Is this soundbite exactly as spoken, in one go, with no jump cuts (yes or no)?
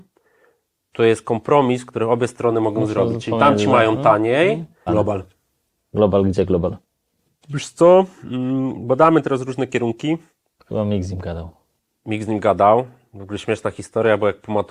no